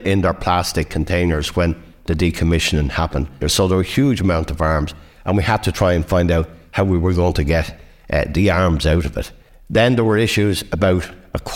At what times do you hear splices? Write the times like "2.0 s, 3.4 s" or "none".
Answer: 3.4 s